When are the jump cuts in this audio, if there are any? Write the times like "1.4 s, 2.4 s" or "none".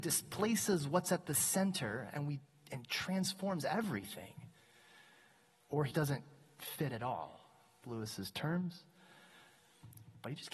5.9 s, 7.8 s